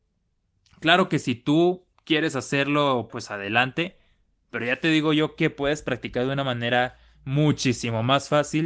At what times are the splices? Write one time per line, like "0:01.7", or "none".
0:03.1